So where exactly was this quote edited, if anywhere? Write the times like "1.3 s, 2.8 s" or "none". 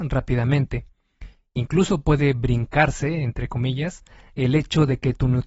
none